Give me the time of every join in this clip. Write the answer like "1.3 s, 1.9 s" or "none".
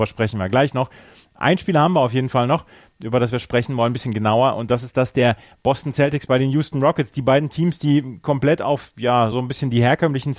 9.3 s